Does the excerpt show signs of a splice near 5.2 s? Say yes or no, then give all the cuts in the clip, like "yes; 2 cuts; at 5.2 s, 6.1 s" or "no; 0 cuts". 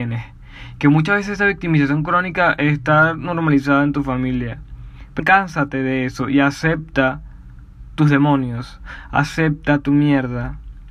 yes; 1 cut; at 5.2 s